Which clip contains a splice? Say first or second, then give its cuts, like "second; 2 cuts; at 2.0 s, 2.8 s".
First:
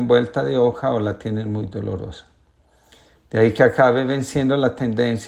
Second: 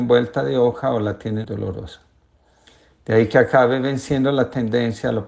second; 1 cut; at 1.4 s